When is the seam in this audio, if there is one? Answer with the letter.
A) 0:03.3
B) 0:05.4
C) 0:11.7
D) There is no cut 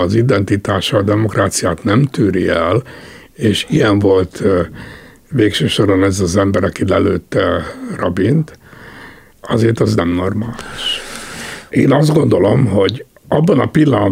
C